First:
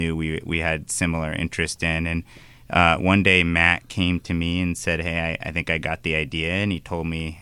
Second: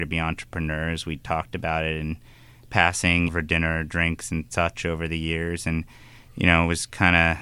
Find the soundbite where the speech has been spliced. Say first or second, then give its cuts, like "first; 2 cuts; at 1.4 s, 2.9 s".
second; 1 cut; at 3.3 s